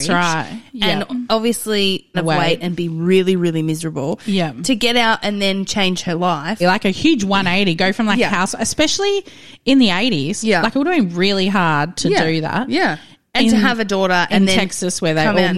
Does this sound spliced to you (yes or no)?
yes